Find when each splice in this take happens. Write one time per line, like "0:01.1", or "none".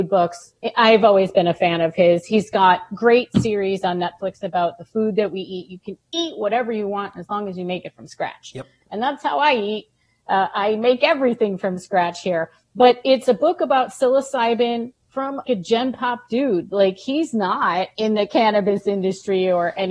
0:15.5